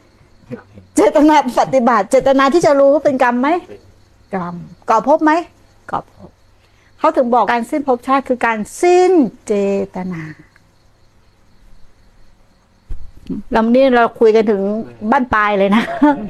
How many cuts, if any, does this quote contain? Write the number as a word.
one